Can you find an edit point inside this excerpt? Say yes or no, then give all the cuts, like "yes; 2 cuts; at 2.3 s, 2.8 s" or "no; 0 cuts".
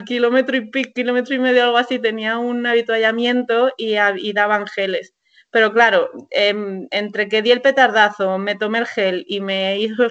no; 0 cuts